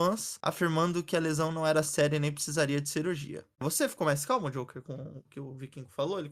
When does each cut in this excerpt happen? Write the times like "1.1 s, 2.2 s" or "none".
3.6 s